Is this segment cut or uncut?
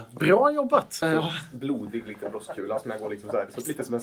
cut